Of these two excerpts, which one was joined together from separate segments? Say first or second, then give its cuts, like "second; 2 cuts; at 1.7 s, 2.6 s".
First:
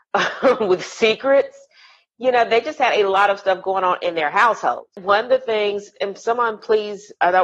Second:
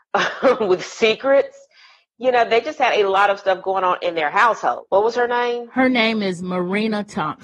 second; 1 cut; at 4.9 s